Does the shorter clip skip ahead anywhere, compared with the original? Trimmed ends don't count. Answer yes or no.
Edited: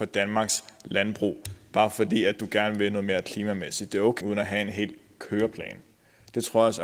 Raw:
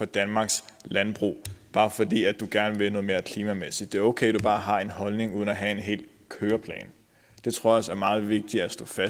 yes